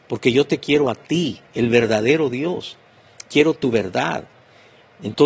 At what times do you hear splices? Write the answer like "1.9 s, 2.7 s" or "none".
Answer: none